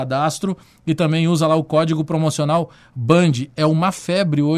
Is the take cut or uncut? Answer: uncut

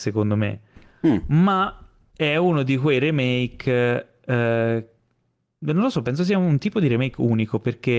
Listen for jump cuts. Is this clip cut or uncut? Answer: uncut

